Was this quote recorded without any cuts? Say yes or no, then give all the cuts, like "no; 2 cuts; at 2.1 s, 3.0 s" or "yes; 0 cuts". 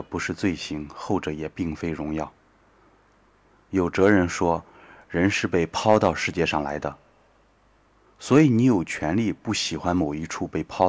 yes; 0 cuts